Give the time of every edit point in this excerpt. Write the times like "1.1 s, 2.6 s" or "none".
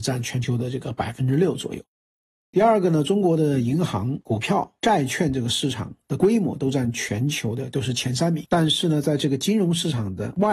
none